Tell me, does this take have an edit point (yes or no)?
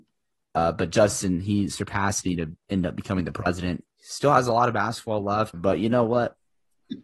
yes